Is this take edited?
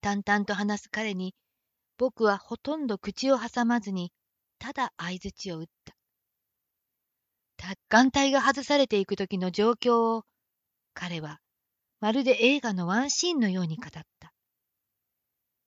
yes; 1 cut; at 7.7 s

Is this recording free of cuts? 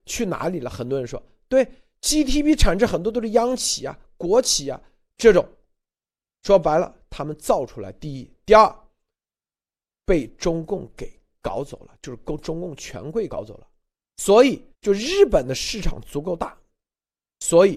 no; 2 cuts; at 13.3 s, 14.7 s

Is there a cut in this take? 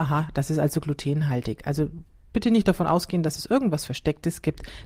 no; 0 cuts

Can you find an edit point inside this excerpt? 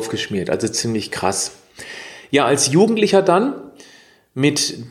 no; 0 cuts

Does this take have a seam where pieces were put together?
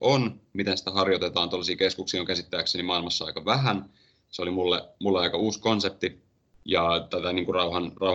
no; 0 cuts

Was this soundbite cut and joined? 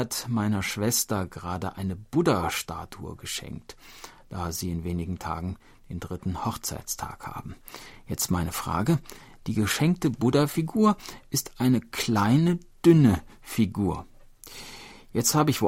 no; 0 cuts

